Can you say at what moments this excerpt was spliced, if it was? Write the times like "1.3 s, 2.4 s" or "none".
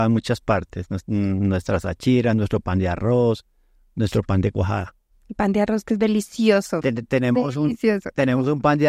none